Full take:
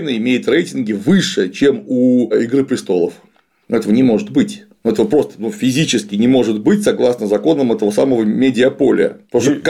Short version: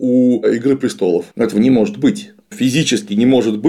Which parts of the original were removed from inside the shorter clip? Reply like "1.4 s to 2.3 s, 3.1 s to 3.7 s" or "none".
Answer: 3.2 s to 3.6 s, 4.8 s to 5.5 s